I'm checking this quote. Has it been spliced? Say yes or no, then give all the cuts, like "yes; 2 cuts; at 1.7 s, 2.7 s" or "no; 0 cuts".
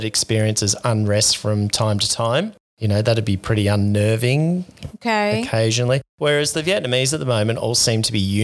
no; 0 cuts